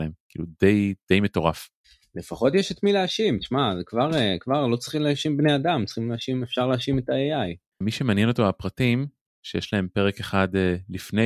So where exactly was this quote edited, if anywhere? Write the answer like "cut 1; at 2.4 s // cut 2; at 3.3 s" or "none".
cut 1; at 7.8 s // cut 2; at 9.3 s

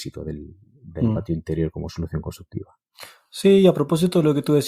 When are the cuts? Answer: none

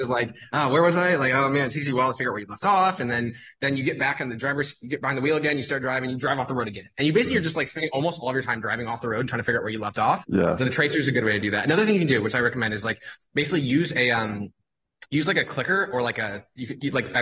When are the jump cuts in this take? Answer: cut 1; at 10.2 s

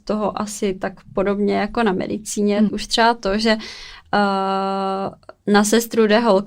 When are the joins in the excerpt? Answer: cut 1; at 2.7 s

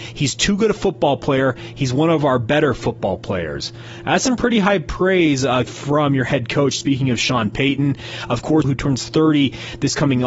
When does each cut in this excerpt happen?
cut 1; at 5.7 s // cut 2; at 8.6 s

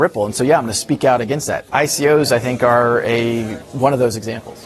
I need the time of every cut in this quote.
cut 1; at 1.7 s // cut 2; at 3.6 s

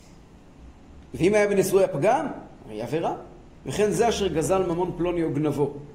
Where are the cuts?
cut 1; at 3.6 s

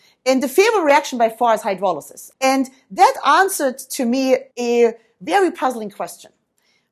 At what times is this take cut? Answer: cut 1; at 2.3 s // cut 2; at 4.5 s

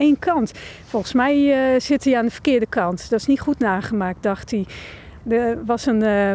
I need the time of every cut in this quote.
cut 1; at 5.2 s

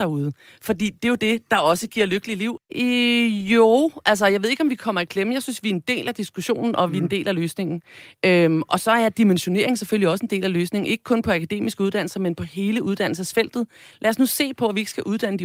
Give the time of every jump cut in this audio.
cut 1; at 2.6 s

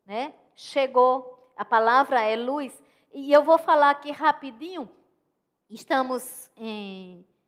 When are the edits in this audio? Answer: none

